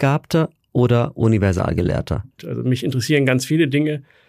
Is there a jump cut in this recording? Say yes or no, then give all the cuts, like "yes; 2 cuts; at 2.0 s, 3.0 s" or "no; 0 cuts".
yes; 1 cut; at 2.4 s